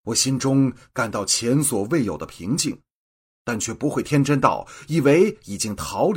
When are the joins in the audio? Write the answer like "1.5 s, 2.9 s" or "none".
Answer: none